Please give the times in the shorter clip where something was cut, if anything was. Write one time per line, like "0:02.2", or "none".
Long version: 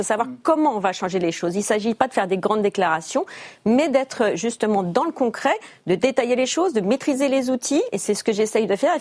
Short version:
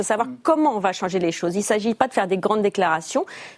none